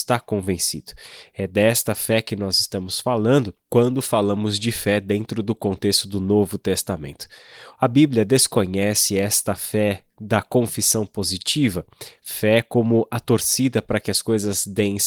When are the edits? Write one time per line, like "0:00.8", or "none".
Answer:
none

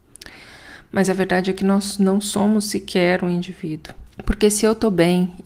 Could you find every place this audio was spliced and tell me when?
0:04.1

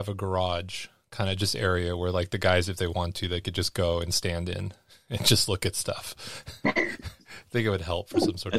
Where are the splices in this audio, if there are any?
none

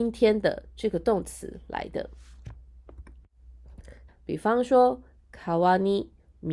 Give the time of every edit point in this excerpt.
0:04.1

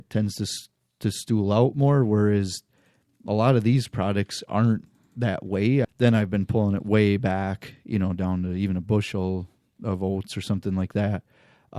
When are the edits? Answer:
0:05.8

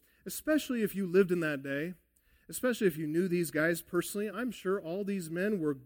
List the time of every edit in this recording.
none

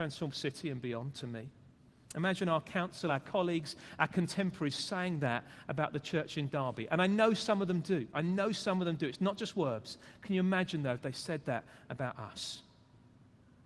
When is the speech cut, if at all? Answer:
none

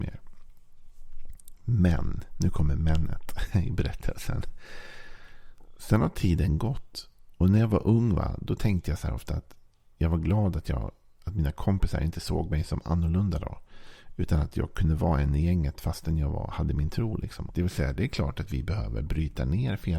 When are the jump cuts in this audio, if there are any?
0:17.5

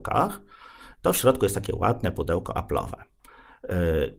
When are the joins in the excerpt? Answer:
none

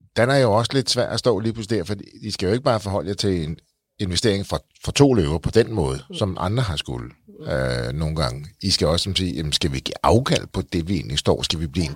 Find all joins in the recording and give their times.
none

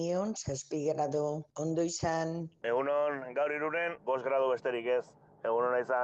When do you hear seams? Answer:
0:04.0

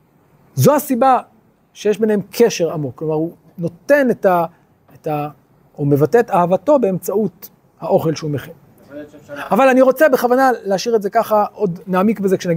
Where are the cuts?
none

